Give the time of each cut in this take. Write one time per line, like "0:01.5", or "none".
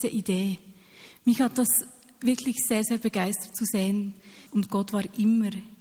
0:04.5